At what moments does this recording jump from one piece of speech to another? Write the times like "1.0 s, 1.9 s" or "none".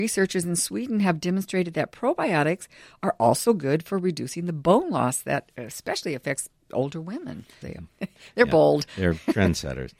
7.6 s

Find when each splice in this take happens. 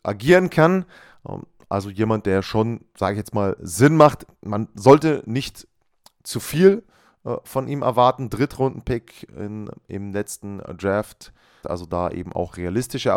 11.6 s

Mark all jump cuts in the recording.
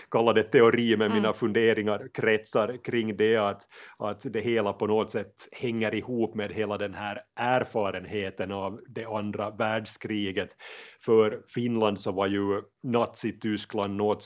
none

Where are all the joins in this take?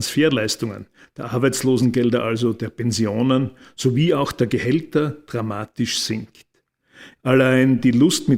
7.2 s

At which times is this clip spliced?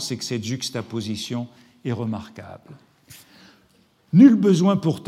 none

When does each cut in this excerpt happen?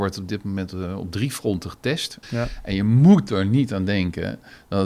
2.2 s

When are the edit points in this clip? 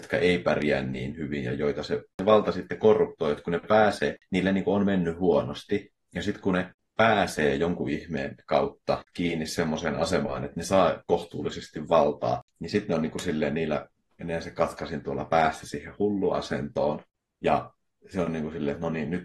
none

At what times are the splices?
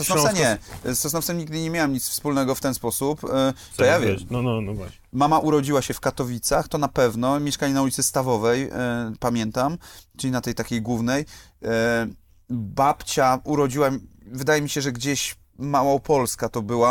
3.7 s

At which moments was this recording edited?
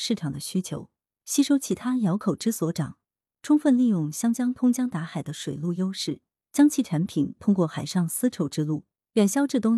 3.3 s

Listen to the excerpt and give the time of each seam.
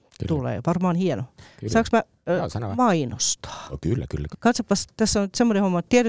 4.3 s

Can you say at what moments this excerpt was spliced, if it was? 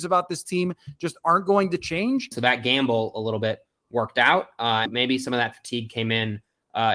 2.3 s, 4.9 s

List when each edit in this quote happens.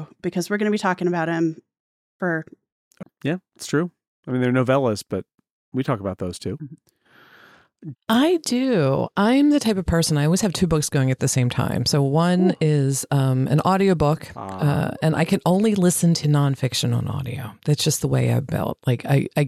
3.0 s, 7.9 s

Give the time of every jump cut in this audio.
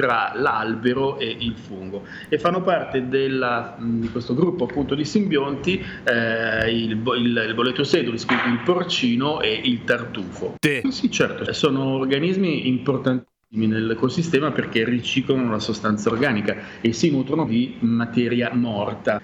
10.6 s, 17.5 s

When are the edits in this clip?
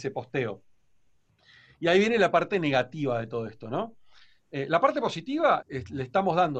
5.6 s

